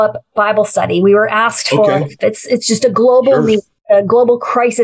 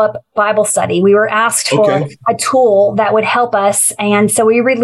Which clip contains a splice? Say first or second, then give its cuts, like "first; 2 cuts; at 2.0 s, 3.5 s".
first; 1 cut; at 2.2 s